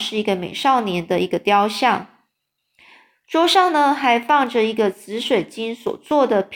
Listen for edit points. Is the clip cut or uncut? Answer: uncut